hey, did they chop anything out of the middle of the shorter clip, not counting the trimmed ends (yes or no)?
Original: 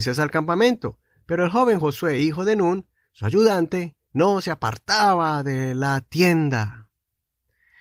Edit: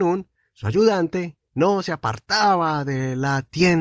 no